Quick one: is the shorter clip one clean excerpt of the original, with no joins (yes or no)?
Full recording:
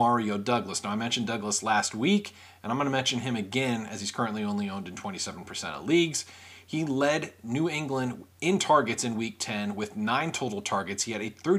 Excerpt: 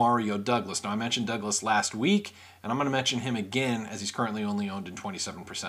yes